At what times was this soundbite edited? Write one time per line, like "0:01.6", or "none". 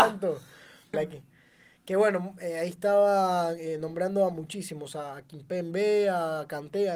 0:00.9